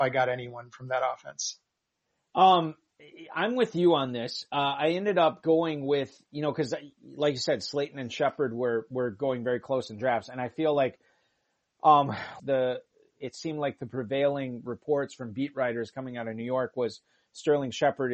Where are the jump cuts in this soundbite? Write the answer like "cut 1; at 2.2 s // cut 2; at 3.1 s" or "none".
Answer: cut 1; at 12.4 s